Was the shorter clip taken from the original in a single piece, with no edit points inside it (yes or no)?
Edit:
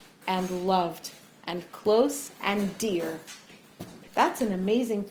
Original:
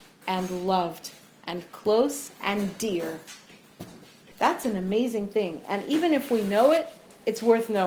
no